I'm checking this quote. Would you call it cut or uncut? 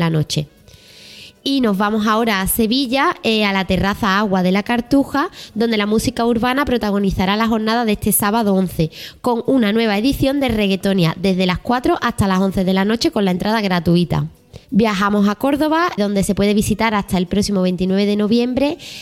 cut